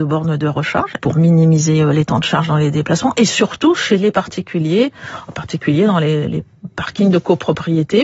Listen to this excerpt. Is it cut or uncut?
cut